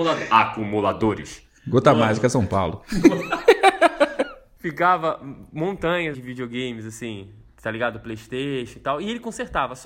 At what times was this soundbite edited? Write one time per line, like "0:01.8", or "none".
0:06.1